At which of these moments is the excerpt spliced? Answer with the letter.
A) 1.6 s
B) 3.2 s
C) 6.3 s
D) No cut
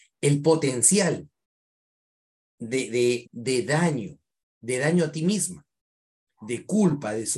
B